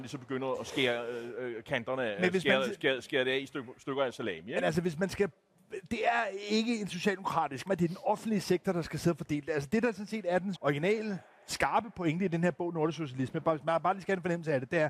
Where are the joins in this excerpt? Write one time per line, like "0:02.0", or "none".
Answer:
0:07.7
0:10.5

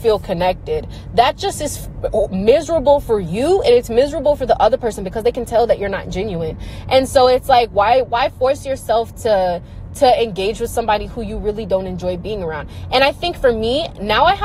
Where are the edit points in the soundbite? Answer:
none

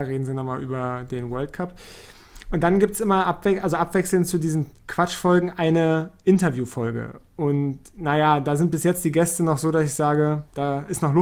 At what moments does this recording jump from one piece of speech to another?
none

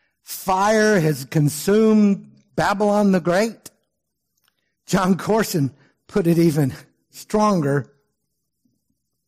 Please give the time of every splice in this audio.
0:07.1

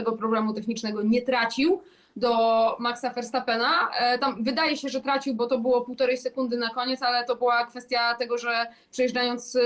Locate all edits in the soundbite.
none

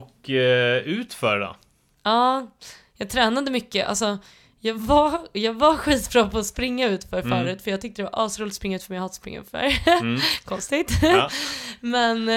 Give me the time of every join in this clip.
none

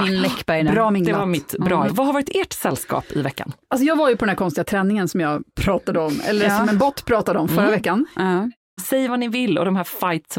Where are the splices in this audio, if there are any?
0:01.9
0:08.8

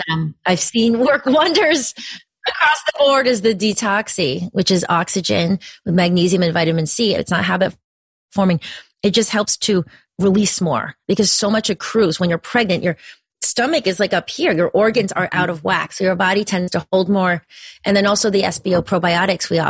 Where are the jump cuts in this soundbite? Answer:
0:07.2

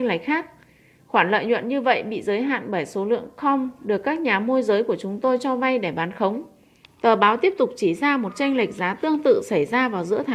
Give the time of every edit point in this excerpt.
0:06.8

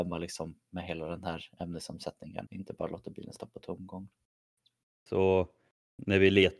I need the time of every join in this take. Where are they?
0:02.5
0:05.1

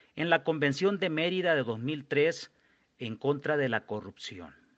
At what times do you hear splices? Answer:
none

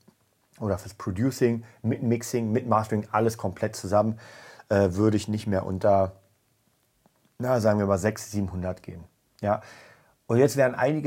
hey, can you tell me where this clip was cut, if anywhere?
none

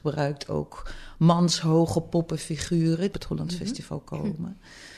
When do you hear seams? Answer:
0:03.1

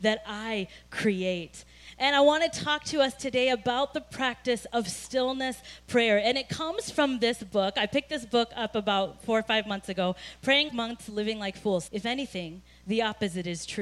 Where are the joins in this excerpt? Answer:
0:10.7
0:11.9

